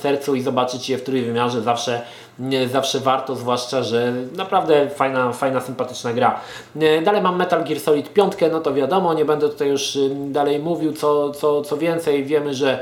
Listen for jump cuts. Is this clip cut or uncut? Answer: uncut